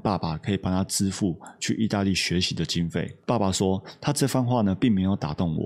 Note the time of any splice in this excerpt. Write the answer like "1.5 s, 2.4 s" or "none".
none